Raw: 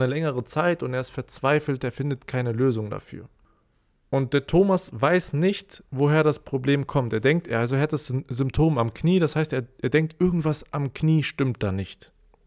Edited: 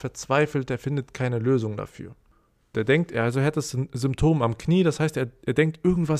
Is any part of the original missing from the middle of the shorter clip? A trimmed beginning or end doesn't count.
yes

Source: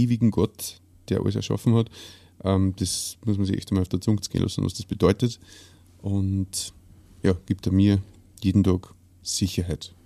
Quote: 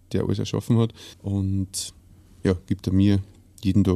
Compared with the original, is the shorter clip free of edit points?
no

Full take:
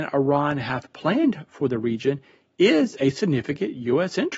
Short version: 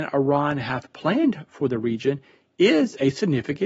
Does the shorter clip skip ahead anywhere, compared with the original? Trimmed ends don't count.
no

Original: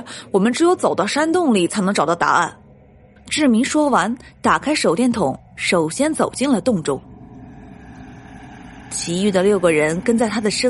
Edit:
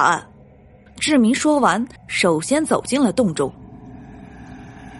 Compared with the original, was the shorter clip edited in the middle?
yes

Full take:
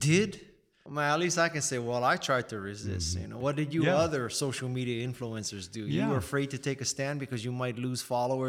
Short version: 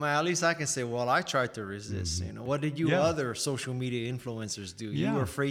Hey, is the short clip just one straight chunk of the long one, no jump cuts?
yes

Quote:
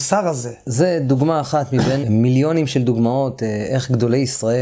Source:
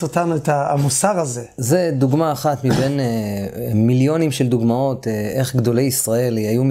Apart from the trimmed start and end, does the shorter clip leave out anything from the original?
yes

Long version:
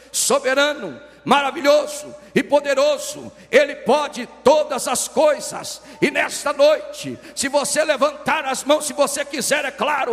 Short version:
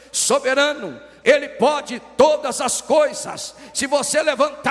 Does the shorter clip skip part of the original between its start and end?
yes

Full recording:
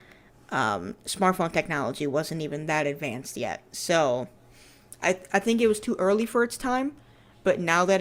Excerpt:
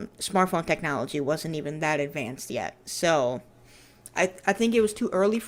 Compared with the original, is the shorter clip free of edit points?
yes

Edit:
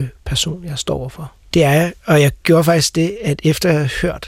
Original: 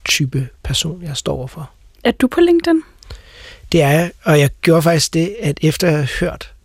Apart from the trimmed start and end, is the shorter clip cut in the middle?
yes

